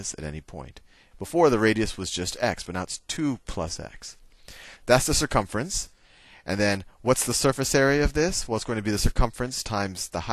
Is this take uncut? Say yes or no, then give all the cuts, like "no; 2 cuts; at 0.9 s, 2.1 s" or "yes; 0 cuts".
no; 2 cuts; at 1.1 s, 4.8 s